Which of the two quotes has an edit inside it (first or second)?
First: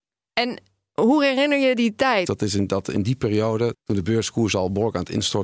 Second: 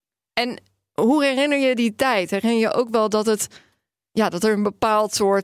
first